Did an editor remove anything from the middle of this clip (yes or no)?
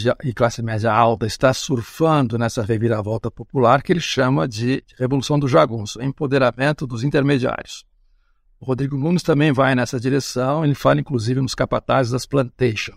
no